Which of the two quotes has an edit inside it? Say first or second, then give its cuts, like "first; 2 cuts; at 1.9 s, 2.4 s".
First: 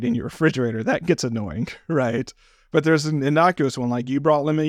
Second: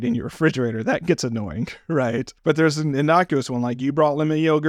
second; 1 cut; at 2.4 s